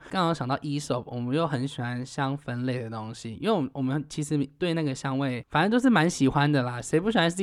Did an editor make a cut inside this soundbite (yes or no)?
no